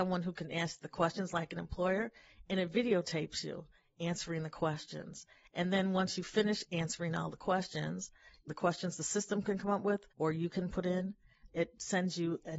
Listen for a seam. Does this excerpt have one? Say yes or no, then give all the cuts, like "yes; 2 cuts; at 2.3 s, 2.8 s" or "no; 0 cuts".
yes; 3 cuts; at 8.5 s, 10.1 s, 11.5 s